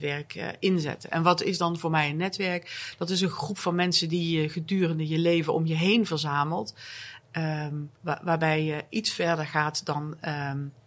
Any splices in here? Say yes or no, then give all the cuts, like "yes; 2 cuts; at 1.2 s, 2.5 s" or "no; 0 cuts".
yes; 1 cut; at 8.0 s